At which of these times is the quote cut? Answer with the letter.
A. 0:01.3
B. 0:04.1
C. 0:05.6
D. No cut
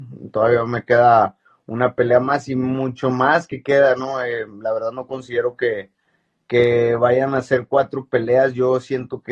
D